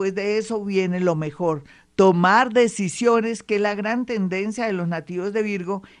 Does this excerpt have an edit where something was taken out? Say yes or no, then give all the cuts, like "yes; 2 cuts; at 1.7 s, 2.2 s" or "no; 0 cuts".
no; 0 cuts